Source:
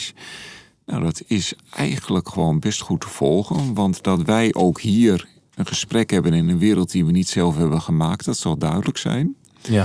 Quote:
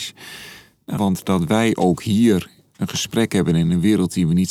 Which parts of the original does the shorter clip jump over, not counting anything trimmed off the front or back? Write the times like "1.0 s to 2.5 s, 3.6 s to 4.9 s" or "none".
1.0 s to 3.8 s